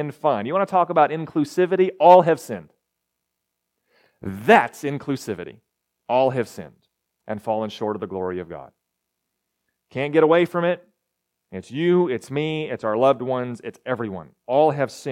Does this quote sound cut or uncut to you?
uncut